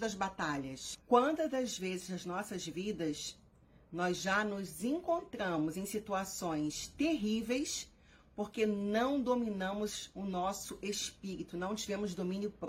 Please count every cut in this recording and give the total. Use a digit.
1